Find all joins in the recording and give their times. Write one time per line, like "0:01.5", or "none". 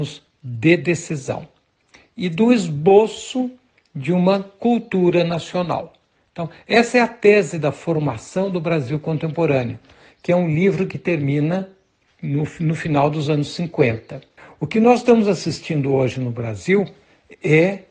none